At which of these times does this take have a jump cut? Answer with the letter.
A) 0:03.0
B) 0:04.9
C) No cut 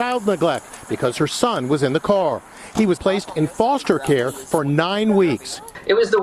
A